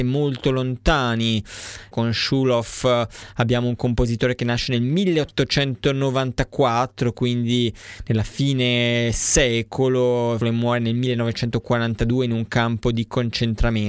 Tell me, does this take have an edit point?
yes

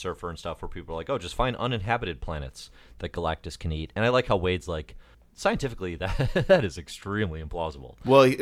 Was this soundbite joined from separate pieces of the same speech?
no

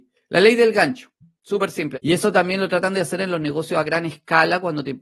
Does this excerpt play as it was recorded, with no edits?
no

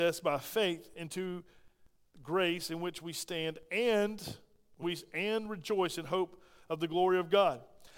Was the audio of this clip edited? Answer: yes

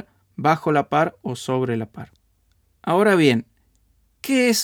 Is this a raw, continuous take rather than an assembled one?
yes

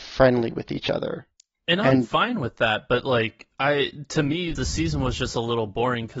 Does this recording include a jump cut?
yes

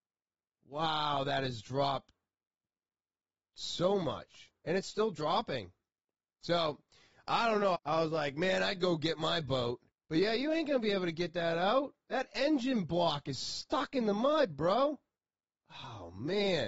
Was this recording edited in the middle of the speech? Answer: yes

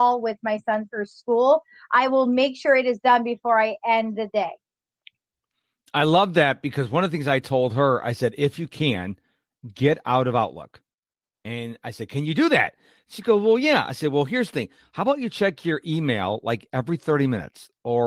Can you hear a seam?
no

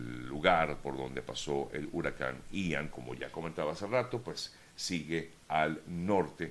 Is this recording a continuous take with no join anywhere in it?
no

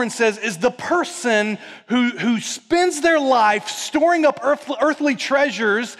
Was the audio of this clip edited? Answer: no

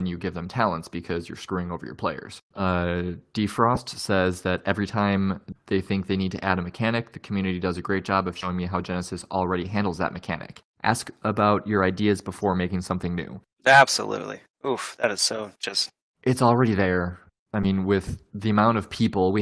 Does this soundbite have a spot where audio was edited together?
no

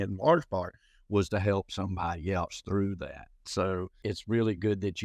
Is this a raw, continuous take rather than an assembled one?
yes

